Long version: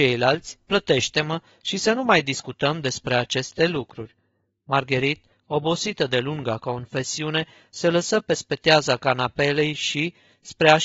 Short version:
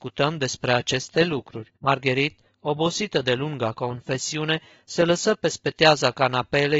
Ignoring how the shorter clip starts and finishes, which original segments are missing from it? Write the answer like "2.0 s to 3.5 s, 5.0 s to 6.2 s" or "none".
4.2 s to 4.6 s